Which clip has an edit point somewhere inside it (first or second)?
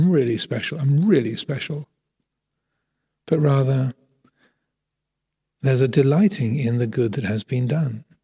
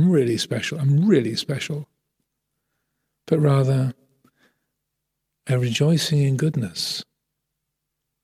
second